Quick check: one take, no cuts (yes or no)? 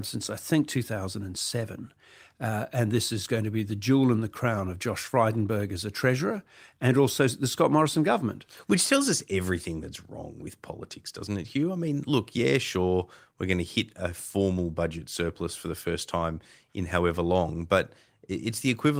yes